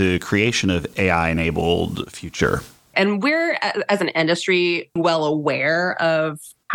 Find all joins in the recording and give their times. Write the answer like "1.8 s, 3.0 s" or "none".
2.9 s, 5.0 s